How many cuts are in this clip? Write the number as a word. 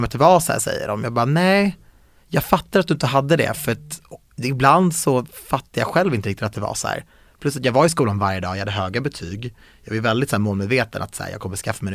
zero